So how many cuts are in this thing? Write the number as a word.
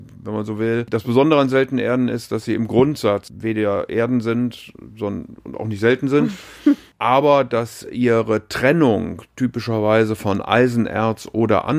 zero